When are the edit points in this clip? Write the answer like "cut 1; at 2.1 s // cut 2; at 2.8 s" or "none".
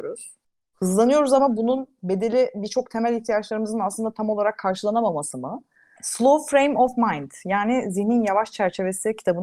cut 1; at 6.0 s